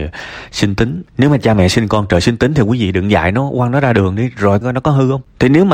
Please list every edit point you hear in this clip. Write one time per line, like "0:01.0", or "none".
0:01.1
0:04.6